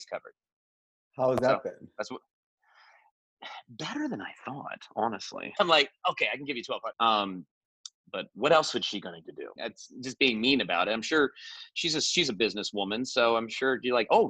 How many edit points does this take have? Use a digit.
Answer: 3